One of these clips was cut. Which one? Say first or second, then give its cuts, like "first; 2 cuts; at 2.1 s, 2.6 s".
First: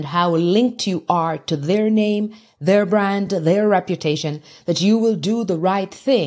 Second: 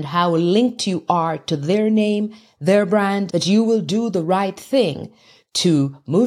second; 1 cut; at 3.3 s